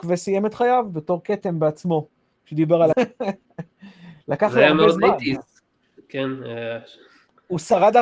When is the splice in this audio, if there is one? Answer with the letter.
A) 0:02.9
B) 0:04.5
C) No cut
A